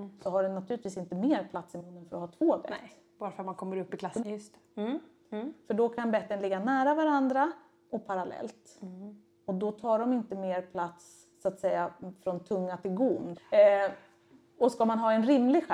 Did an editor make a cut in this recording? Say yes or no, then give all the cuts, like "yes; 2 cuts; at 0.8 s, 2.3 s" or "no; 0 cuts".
yes; 3 cuts; at 4.2 s, 11.3 s, 13.3 s